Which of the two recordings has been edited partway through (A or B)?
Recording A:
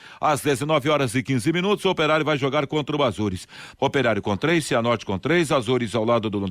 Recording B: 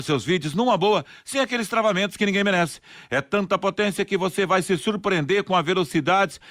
A